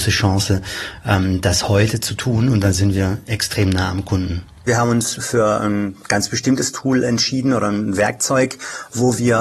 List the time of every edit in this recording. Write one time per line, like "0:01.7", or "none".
none

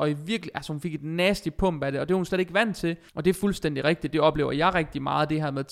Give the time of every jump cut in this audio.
0:03.1

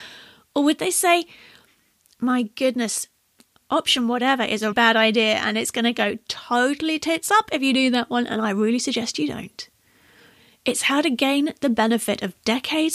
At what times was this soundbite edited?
0:04.7

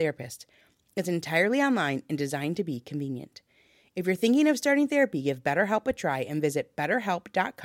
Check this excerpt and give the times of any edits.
none

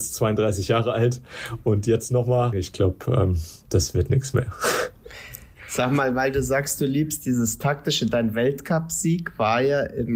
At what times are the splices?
0:02.5

